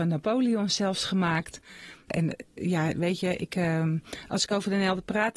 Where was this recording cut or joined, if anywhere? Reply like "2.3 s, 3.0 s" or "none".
none